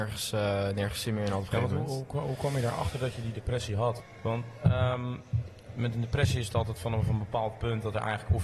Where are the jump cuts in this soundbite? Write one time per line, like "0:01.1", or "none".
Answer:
none

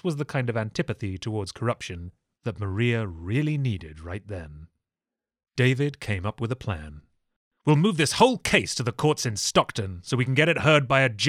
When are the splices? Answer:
none

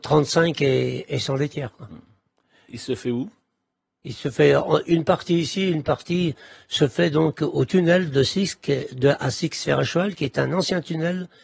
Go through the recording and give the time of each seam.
0:02.7

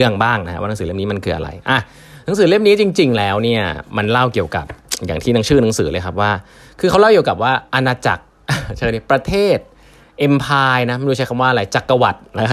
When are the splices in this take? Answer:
0:07.7

